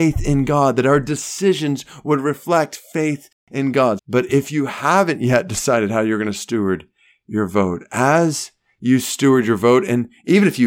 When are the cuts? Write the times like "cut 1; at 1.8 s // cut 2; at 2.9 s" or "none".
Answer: cut 1; at 4.0 s